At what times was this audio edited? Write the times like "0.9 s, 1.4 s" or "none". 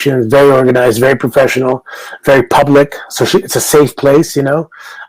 none